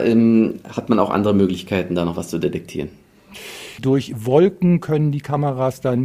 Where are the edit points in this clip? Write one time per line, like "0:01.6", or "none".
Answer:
0:03.8